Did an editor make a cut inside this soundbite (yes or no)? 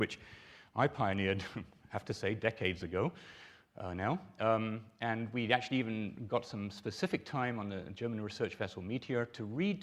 no